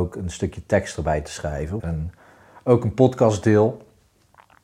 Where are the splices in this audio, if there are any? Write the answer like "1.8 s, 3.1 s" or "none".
1.8 s